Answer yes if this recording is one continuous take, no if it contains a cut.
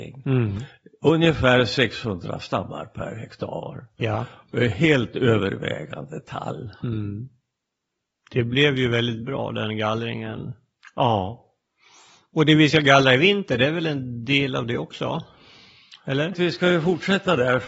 no